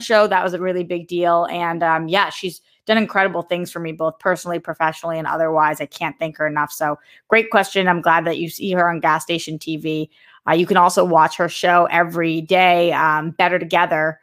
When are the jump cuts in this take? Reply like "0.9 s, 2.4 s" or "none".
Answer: none